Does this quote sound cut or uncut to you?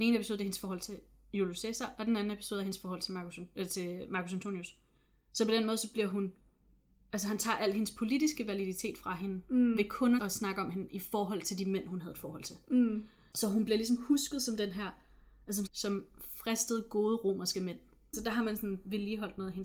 cut